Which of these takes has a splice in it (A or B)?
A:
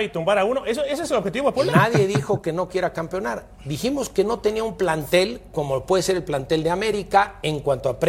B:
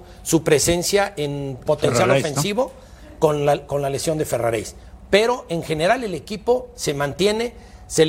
B